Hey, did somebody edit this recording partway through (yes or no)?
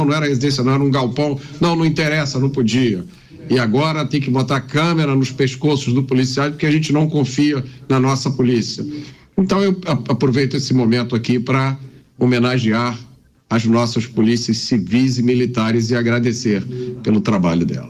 no